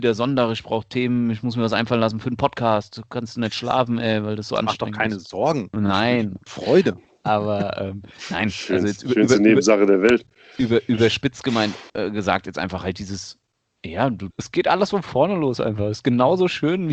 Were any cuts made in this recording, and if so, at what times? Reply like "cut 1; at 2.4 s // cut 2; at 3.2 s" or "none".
cut 1; at 6.5 s // cut 2; at 11.9 s // cut 3; at 14.3 s